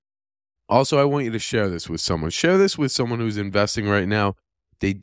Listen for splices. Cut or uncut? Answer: uncut